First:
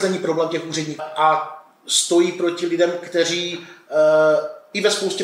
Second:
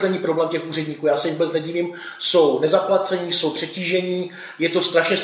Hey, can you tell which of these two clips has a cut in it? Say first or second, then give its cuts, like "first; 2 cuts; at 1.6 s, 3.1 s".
first; 1 cut; at 1.0 s